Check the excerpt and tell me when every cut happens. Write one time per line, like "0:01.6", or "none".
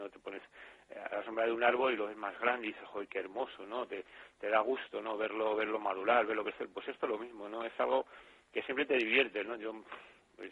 none